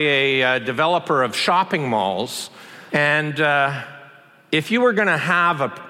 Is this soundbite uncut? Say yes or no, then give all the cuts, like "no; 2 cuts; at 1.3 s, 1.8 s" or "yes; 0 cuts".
no; 1 cut; at 2.9 s